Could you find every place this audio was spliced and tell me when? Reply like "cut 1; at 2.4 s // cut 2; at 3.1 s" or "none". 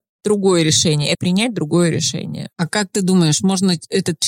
cut 1; at 1.1 s